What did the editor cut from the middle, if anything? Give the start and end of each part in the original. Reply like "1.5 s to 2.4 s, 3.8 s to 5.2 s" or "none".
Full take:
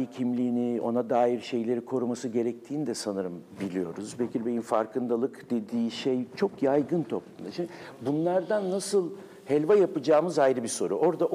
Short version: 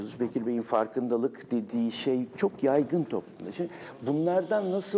none